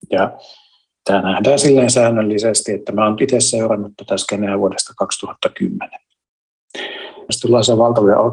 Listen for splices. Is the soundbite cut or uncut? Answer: cut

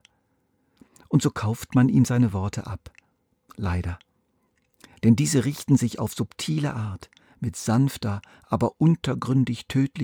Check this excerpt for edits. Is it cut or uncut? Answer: uncut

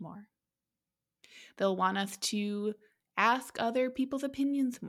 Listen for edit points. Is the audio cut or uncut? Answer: uncut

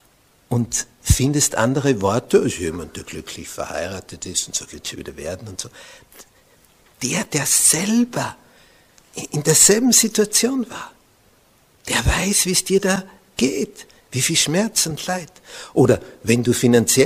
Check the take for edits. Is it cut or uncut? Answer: cut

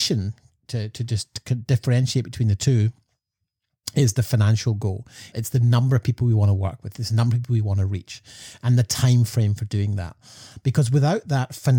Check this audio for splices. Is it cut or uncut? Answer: cut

